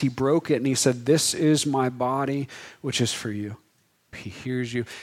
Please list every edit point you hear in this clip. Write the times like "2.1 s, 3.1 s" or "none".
4.1 s